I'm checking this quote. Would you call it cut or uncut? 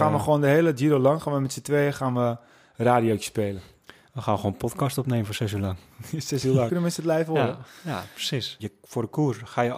cut